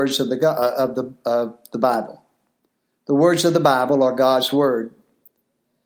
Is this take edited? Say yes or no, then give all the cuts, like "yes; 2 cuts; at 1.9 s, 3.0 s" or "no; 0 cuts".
no; 0 cuts